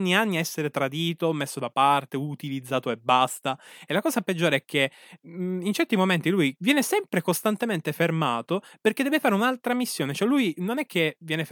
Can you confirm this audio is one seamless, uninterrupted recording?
no; 1 cut; at 6.6 s

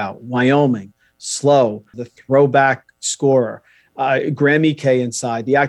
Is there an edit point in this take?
yes; 1 cut; at 1.9 s

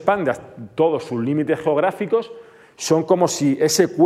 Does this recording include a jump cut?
no; 0 cuts

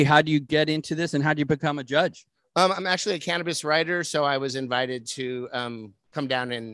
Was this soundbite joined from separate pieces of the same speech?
no; 0 cuts

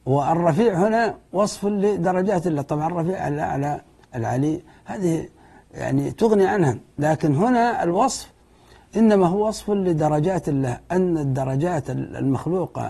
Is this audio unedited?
yes; 0 cuts

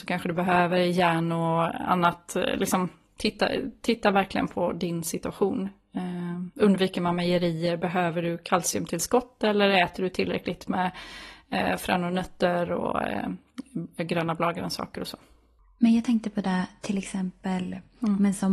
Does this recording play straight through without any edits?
yes; 0 cuts

